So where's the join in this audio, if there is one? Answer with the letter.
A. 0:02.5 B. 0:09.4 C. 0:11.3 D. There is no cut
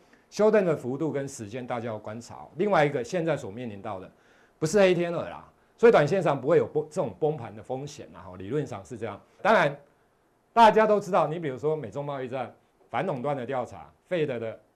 B